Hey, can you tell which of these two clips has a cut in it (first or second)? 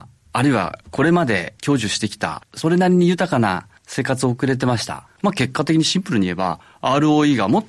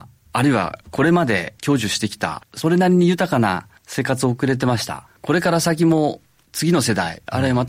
first